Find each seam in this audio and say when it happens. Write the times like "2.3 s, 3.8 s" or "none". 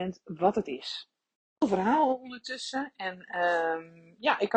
none